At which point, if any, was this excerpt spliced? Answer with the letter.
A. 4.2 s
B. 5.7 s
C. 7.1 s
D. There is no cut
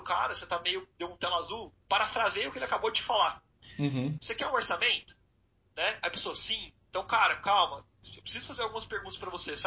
A